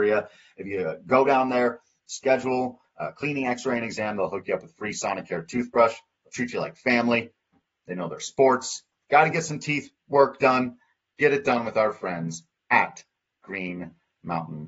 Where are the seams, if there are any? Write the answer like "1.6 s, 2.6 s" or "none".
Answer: none